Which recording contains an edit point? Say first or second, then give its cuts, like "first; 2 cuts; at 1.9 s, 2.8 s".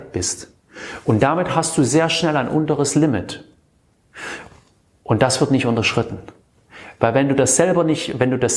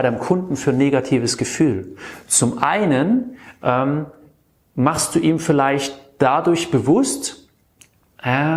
first; 1 cut; at 1.0 s